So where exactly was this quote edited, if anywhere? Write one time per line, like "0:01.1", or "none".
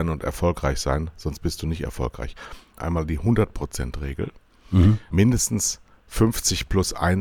0:02.8
0:05.1